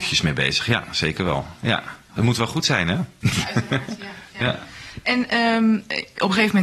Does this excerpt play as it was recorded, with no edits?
yes; 0 cuts

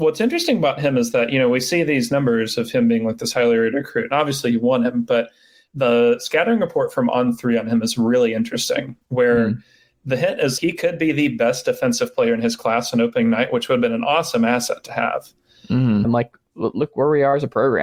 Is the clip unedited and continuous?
no; 2 cuts; at 10.6 s, 16.0 s

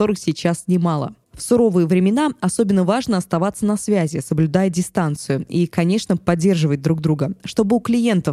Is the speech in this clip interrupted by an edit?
no; 0 cuts

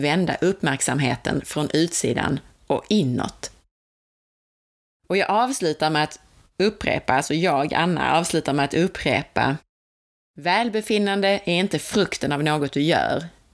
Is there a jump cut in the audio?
no; 0 cuts

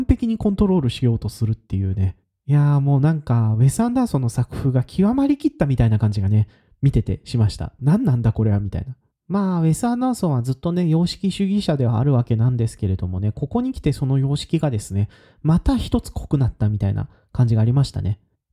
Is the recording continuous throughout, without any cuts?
no; 1 cut; at 7.8 s

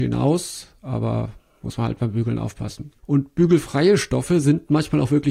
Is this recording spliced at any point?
yes; 1 cut; at 3.0 s

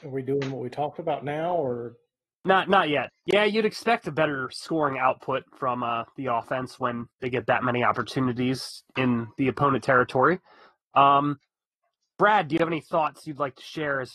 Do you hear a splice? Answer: yes; 2 cuts; at 3.1 s, 7.1 s

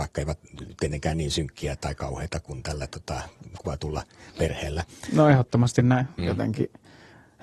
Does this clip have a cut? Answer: yes; 1 cut; at 6.2 s

